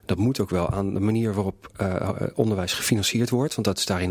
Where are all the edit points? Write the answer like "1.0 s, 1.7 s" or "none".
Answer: none